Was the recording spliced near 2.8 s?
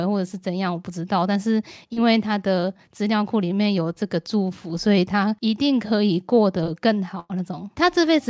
no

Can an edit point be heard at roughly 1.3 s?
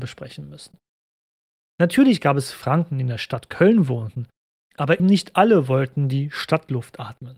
no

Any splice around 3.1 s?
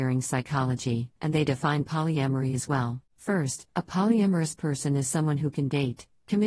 yes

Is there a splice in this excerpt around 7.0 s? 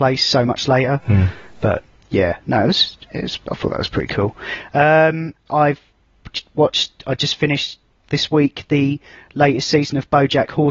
no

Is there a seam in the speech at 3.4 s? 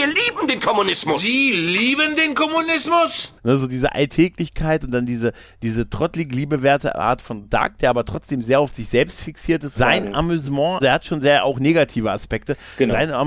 no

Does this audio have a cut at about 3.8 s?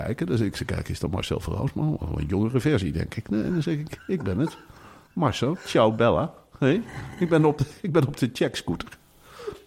no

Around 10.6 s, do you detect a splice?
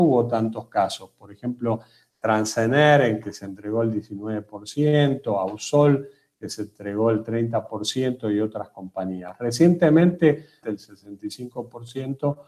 yes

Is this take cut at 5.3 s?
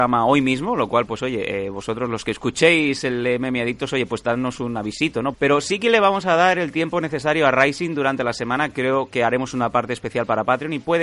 yes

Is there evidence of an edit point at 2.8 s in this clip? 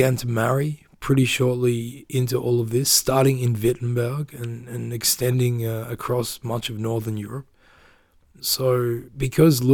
no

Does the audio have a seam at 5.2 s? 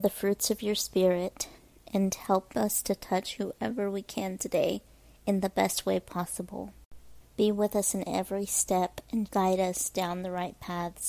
no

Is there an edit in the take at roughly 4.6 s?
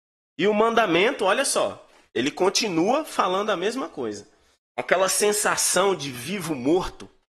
yes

